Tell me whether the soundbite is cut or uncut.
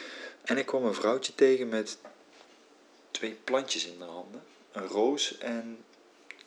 uncut